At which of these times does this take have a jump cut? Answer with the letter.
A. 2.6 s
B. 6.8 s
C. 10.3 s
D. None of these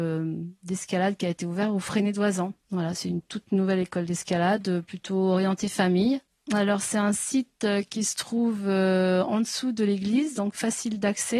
A